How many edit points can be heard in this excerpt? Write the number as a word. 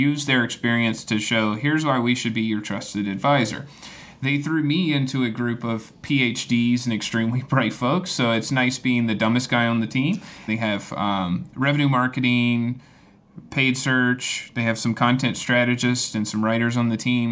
one